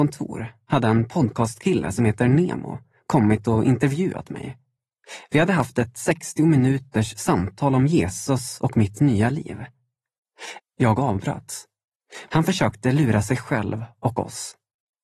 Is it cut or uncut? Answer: cut